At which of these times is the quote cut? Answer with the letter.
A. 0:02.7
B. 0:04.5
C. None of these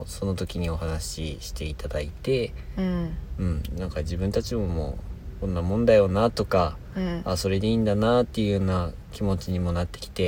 C